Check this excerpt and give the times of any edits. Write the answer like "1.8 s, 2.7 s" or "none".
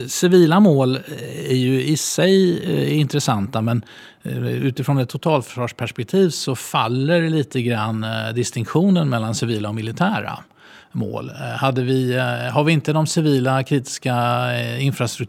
none